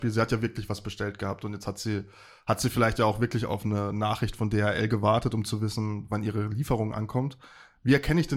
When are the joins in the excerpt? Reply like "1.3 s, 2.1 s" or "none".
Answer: none